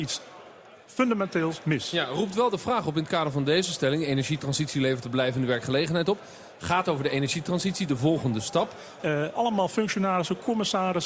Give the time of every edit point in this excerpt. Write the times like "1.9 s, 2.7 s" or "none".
9.0 s